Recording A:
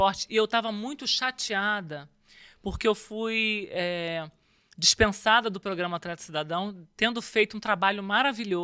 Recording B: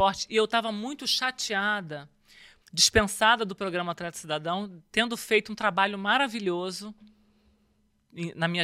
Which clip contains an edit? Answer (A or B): B